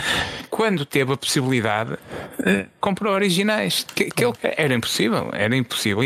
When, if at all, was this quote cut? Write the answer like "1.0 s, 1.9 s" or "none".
4.4 s